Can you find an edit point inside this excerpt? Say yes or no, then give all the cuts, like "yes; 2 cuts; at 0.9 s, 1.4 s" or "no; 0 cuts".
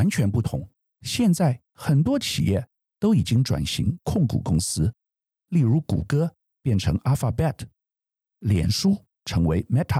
yes; 1 cut; at 0.9 s